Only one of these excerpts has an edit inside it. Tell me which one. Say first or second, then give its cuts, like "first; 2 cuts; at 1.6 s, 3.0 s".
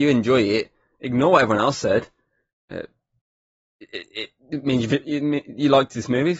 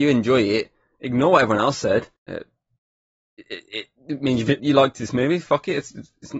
second; 2 cuts; at 2.2 s, 4.6 s